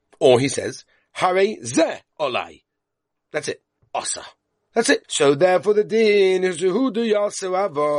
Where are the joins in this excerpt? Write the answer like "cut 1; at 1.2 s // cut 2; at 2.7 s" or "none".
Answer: cut 1; at 3.8 s // cut 2; at 5.0 s

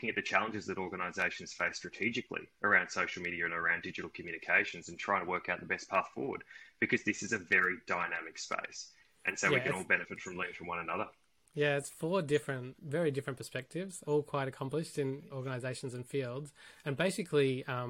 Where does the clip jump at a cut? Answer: cut 1; at 12.7 s // cut 2; at 14.0 s // cut 3; at 15.3 s

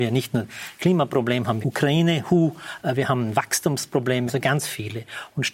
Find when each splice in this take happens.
cut 1; at 1.6 s // cut 2; at 4.3 s

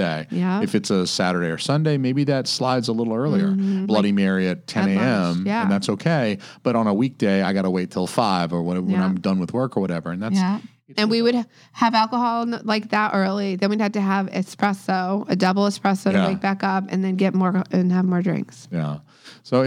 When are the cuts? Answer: cut 1; at 3.8 s

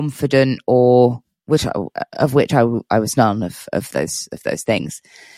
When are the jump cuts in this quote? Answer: none

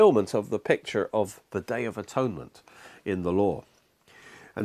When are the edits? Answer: none

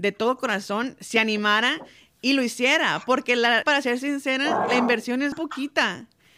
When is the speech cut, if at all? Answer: cut 1; at 3.6 s // cut 2; at 5.3 s

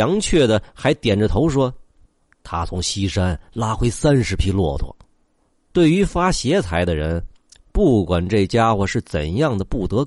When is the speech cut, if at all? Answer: cut 1; at 5.6 s

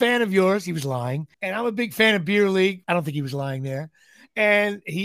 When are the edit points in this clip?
cut 1; at 1.3 s // cut 2; at 2.8 s

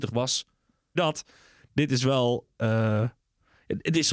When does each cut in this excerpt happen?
cut 1; at 1.0 s

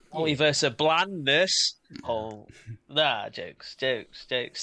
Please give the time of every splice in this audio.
cut 1; at 2.0 s

